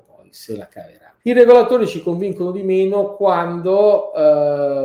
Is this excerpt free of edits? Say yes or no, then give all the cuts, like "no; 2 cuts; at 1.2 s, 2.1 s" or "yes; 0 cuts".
no; 1 cut; at 1.2 s